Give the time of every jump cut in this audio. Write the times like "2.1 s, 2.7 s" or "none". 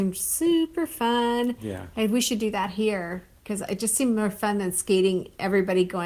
none